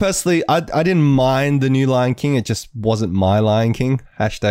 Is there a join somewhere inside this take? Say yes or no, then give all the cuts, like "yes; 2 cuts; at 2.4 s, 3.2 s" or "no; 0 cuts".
no; 0 cuts